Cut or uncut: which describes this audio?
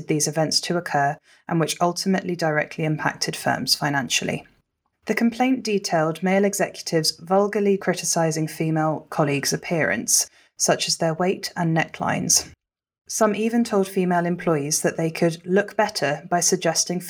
cut